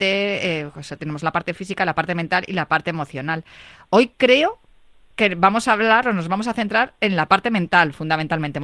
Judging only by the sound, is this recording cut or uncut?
uncut